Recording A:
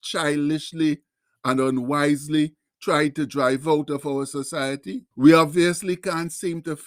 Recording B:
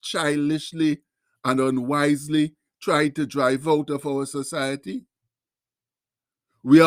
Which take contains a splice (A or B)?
A